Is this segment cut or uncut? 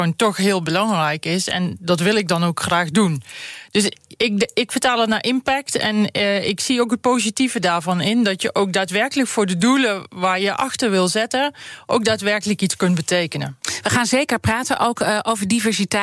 uncut